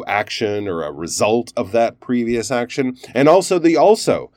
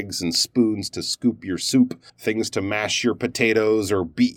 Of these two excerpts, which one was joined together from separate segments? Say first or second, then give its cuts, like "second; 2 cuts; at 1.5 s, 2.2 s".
second; 1 cut; at 2.1 s